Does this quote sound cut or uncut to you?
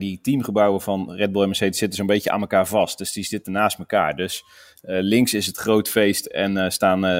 uncut